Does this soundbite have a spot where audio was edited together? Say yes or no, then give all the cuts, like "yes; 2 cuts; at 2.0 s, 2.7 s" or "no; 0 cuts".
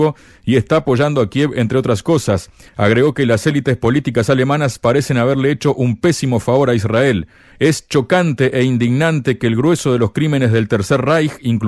yes; 2 cuts; at 2.7 s, 7.5 s